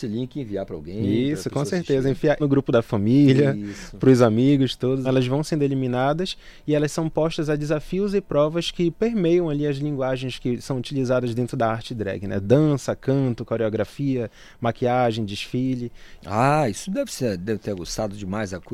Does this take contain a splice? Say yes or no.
yes